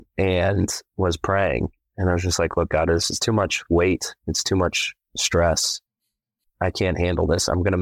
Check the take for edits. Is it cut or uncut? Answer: uncut